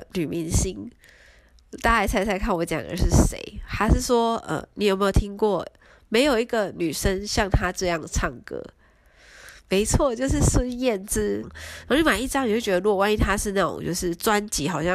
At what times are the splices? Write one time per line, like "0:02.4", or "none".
0:11.4

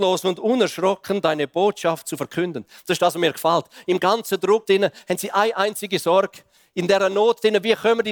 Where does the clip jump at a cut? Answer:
0:04.7

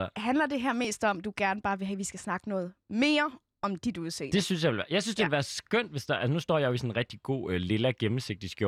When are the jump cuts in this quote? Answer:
none

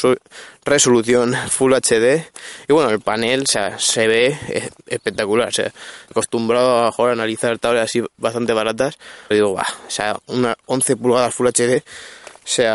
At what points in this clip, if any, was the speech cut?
0:06.1
0:09.3

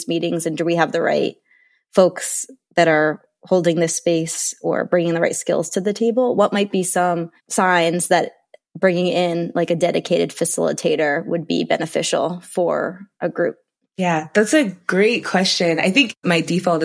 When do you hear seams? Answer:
none

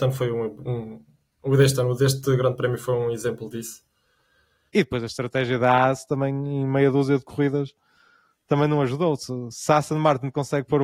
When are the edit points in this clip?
0:04.7

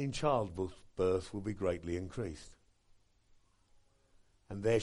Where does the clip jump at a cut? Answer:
none

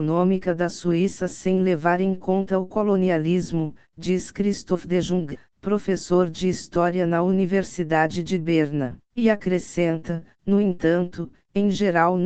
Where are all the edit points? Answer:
0:09.0

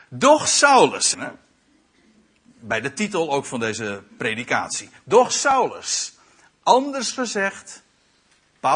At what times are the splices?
0:01.1

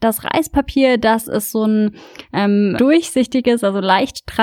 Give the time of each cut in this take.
0:02.8

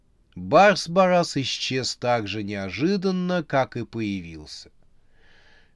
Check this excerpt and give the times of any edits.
none

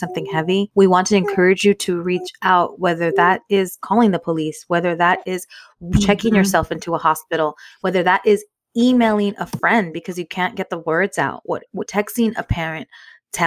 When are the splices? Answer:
0:11.9

